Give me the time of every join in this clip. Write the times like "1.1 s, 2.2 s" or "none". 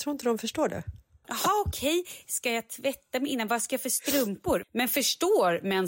1.2 s, 4.6 s